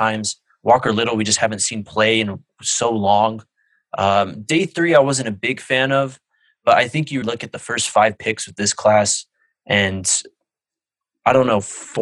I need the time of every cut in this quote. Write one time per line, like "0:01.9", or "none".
0:07.2